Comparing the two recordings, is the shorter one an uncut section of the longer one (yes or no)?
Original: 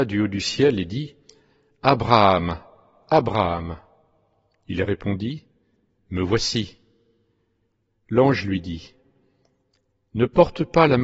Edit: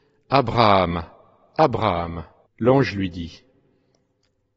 no